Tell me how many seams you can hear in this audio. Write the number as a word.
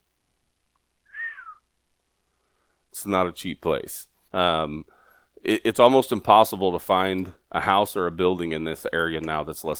one